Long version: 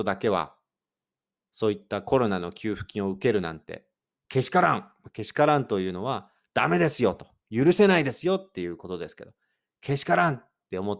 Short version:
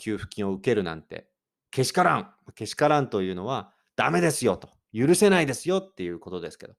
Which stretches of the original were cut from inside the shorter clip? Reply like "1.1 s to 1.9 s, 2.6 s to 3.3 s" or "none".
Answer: none